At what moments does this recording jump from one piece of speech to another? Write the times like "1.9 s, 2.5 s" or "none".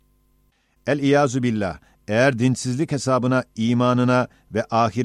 none